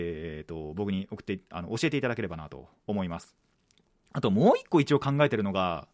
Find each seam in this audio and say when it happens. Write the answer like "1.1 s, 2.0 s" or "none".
none